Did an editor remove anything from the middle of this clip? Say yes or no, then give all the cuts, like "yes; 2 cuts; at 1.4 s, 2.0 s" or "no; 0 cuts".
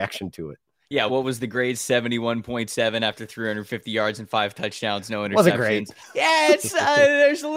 yes; 1 cut; at 1.1 s